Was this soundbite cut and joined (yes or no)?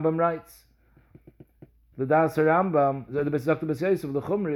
yes